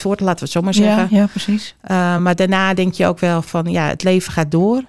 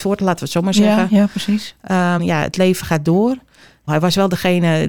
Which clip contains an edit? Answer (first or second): second